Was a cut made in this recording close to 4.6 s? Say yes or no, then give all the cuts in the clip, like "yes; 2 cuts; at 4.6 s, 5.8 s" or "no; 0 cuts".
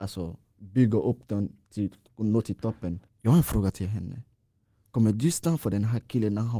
no; 1 cut; at 3.1 s